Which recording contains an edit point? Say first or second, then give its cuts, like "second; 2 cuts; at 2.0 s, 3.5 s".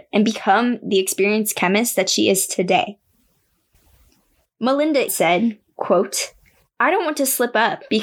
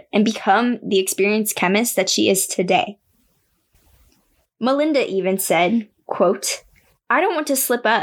first; 1 cut; at 5.1 s